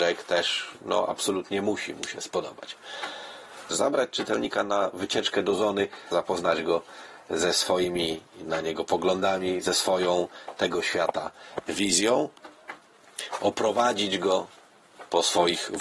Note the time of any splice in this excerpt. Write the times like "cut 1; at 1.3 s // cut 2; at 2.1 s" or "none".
cut 1; at 3.7 s // cut 2; at 6.1 s